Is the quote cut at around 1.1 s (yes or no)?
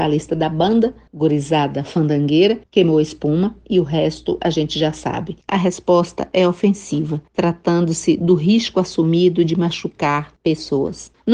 no